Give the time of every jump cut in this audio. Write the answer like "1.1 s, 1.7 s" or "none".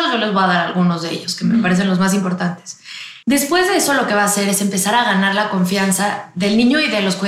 3.2 s